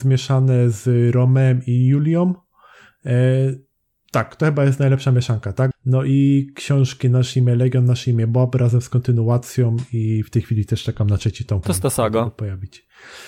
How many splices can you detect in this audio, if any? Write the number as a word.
two